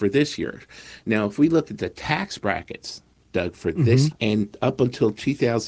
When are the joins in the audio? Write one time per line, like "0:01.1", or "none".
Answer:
0:04.1